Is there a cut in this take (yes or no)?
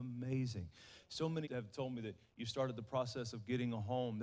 yes